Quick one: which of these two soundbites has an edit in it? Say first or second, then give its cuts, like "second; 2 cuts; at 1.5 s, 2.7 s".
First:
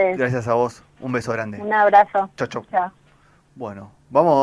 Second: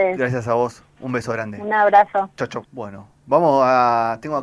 second; 1 cut; at 2.6 s